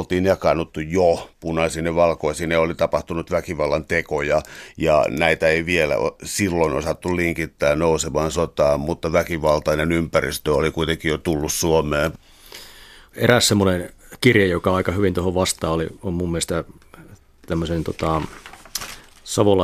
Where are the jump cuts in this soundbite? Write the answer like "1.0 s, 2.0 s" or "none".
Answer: 13.1 s